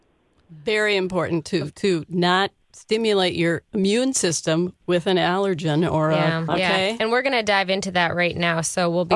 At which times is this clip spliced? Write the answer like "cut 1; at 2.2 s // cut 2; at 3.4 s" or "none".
cut 1; at 1.7 s // cut 2; at 6.5 s